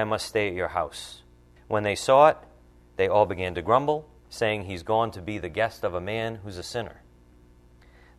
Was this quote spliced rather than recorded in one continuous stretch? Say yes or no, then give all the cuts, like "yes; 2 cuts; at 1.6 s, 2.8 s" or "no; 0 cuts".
yes; 2 cuts; at 1.6 s, 4.2 s